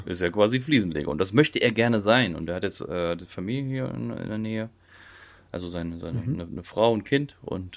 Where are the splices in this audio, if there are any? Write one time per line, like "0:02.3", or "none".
none